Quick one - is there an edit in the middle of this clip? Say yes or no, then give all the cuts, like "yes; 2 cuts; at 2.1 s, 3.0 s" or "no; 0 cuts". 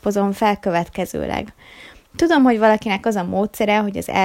no; 0 cuts